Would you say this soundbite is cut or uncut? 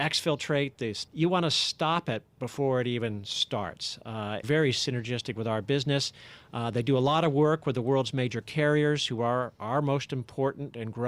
cut